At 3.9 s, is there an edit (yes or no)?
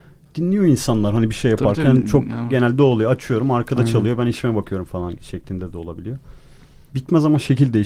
no